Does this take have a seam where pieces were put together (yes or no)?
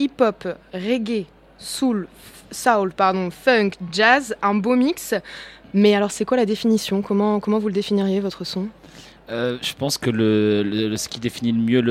no